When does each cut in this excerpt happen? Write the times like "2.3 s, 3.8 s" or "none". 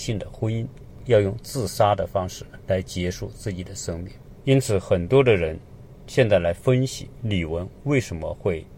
1.0 s